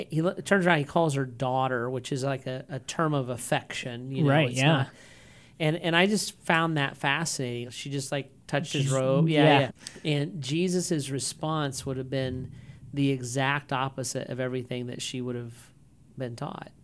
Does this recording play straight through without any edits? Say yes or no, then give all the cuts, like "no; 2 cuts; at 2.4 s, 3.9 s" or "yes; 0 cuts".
no; 2 cuts; at 7.7 s, 9.7 s